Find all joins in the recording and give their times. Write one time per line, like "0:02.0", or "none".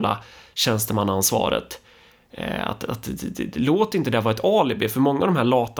none